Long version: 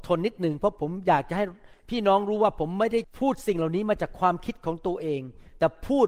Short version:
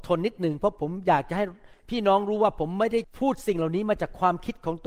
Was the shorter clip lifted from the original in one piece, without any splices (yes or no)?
yes